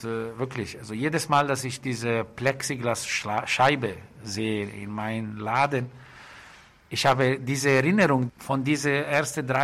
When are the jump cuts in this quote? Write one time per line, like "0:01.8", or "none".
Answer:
0:08.3